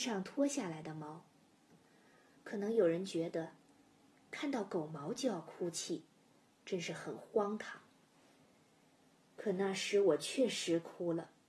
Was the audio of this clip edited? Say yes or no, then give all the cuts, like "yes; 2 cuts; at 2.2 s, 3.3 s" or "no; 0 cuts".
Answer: yes; 1 cut; at 2.4 s